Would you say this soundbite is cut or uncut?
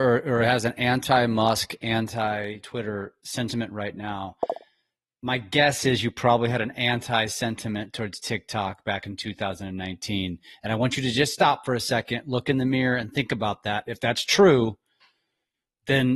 uncut